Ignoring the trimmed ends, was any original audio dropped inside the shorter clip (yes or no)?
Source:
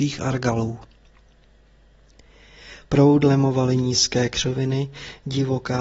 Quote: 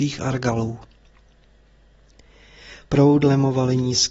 no